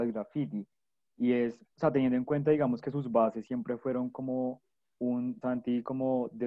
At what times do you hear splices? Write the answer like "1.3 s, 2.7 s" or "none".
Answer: 1.7 s, 5.4 s